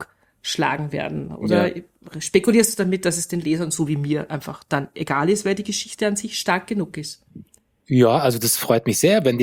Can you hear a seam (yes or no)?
no